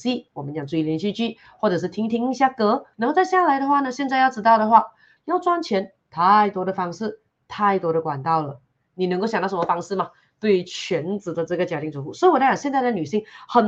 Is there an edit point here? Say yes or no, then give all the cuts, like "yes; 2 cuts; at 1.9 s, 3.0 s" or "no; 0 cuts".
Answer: yes; 2 cuts; at 2.9 s, 5.2 s